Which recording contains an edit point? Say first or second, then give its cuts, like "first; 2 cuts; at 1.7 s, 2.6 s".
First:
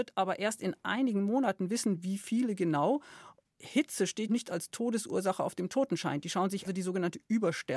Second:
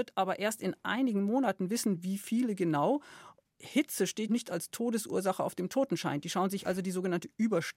first; 1 cut; at 6.6 s